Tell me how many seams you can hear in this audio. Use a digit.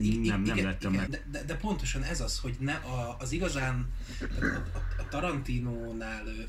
1